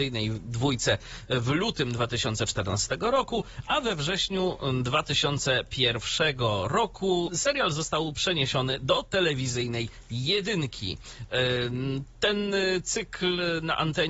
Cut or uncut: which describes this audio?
cut